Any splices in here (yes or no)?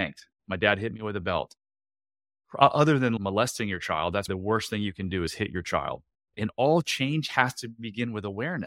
yes